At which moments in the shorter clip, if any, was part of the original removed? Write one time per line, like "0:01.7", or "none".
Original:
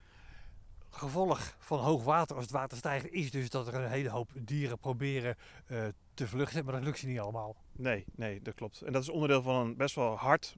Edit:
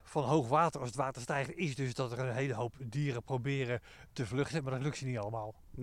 0:04.1